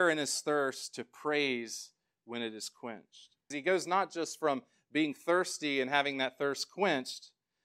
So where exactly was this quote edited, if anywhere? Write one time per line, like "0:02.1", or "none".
0:03.5